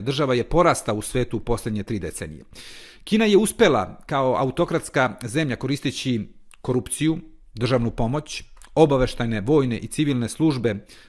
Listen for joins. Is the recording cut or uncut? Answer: uncut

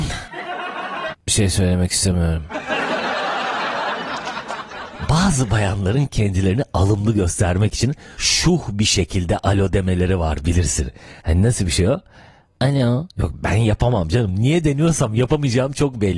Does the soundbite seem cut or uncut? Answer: cut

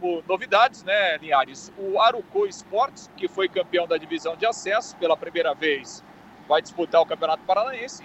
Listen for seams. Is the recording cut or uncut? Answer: cut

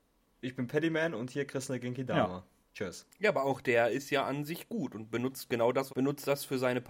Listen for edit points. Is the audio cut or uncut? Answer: cut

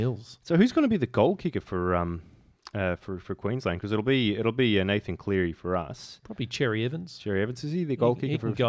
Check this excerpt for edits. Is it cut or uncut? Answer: uncut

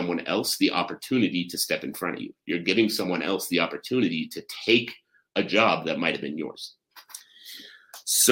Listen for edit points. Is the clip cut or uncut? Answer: uncut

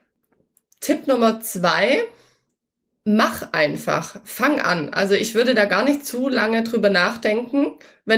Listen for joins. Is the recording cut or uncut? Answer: uncut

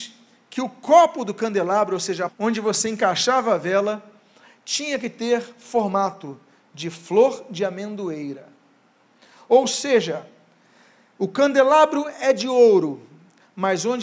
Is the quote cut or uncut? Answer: cut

